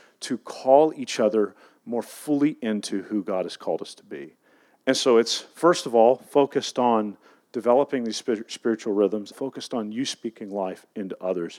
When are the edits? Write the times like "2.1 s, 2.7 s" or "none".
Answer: 9.3 s